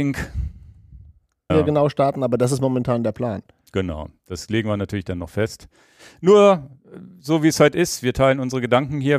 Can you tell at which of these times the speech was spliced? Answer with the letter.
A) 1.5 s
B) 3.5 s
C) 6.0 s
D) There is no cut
A